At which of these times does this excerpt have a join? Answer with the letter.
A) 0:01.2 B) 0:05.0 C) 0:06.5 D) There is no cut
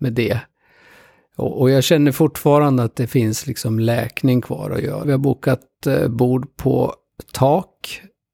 B